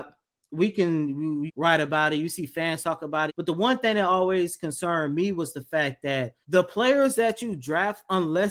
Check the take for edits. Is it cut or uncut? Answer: cut